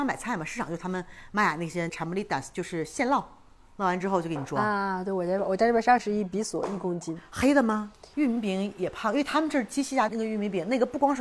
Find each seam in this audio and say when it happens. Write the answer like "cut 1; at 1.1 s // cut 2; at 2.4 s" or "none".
cut 1; at 8.1 s